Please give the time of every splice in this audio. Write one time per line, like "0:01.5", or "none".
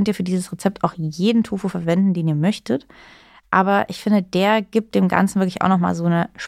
none